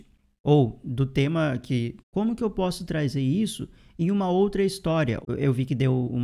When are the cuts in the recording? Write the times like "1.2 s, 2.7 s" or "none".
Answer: 2.0 s, 5.2 s